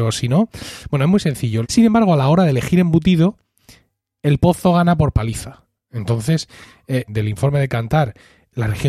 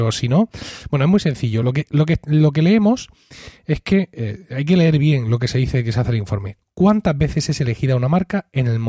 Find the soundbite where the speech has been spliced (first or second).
first